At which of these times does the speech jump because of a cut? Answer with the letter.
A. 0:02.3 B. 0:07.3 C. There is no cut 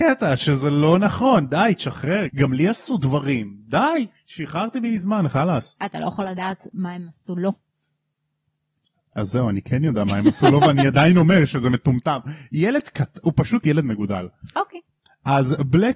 A